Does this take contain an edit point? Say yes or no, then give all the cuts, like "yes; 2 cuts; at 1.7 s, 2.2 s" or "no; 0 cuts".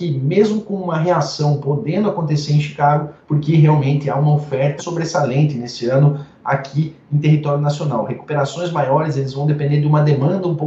yes; 2 cuts; at 3.2 s, 4.8 s